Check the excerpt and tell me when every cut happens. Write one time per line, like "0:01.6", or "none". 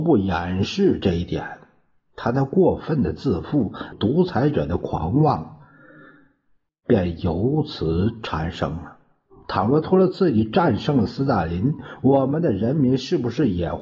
0:03.9
0:09.4